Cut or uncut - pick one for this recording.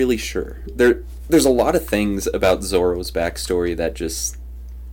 uncut